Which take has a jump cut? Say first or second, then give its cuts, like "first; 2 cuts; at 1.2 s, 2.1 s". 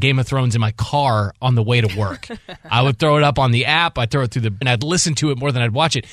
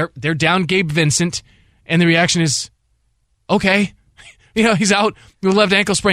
first; 1 cut; at 4.6 s